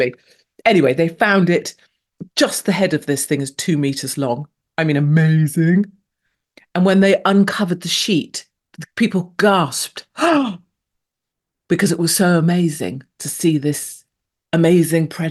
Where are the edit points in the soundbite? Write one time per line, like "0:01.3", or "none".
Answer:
none